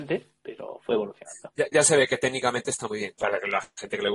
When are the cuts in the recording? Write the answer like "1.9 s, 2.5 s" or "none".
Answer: 3.2 s